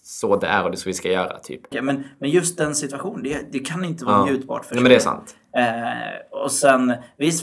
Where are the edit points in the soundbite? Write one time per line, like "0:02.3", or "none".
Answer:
0:01.7
0:04.7